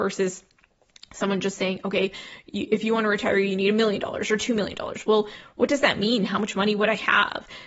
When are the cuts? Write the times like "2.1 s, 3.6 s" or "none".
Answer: none